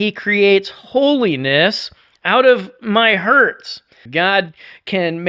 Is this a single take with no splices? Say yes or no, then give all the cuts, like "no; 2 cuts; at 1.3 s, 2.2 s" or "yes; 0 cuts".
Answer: no; 1 cut; at 4.1 s